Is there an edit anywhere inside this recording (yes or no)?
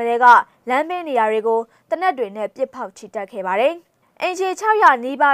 no